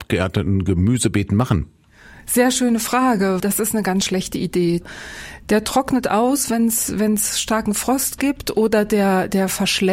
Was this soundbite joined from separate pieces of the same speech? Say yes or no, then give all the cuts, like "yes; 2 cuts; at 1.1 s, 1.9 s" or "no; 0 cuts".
yes; 1 cut; at 3.4 s